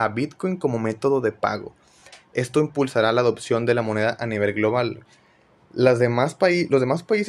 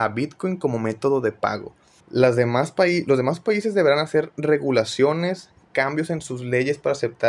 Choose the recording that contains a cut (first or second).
second